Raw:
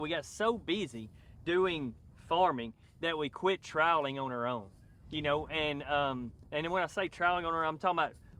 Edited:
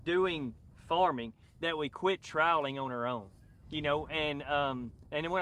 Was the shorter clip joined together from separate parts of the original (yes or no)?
no